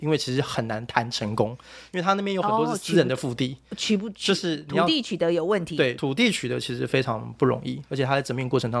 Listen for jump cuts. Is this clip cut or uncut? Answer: uncut